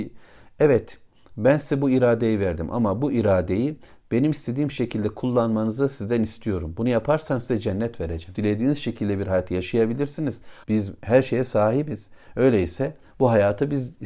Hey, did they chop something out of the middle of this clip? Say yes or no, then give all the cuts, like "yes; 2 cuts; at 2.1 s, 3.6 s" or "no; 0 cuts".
yes; 2 cuts; at 8.3 s, 10.6 s